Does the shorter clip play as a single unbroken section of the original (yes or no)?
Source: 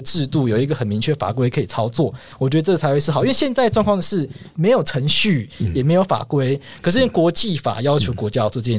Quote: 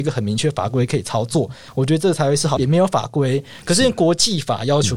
no